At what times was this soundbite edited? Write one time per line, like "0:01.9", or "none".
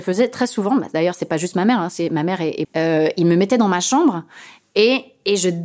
0:02.6